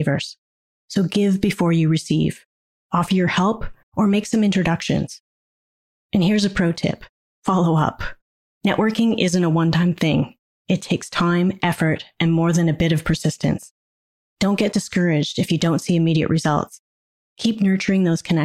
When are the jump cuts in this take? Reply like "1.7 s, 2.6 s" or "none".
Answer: 3.8 s